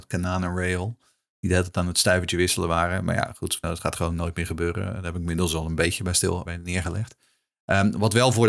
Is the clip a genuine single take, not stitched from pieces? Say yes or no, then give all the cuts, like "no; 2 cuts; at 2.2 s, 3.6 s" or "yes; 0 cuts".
no; 2 cuts; at 3.6 s, 6.5 s